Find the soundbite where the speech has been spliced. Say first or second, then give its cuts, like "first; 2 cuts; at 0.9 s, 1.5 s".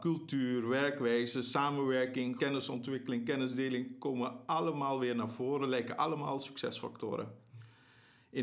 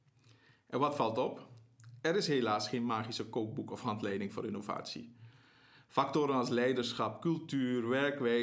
first; 1 cut; at 2.4 s